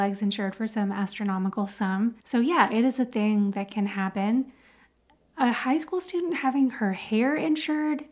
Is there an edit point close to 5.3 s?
no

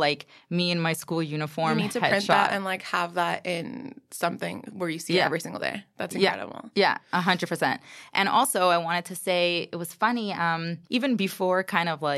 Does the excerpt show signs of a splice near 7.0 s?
no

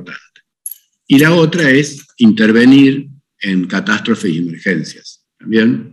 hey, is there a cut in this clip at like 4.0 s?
no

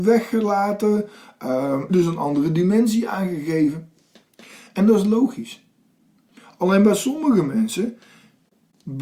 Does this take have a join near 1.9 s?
yes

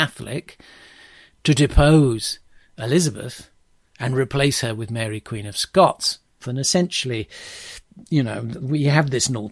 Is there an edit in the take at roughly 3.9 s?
no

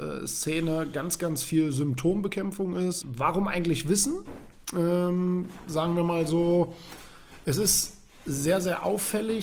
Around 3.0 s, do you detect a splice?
yes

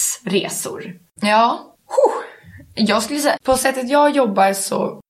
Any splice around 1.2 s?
yes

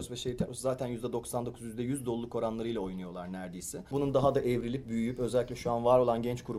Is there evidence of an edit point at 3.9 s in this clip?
yes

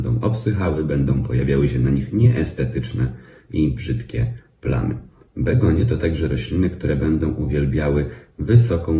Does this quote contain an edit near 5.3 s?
no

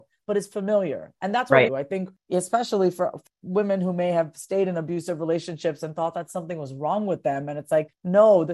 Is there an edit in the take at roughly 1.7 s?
yes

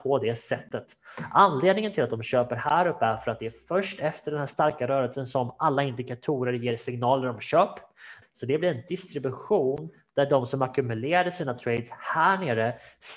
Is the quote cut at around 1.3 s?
no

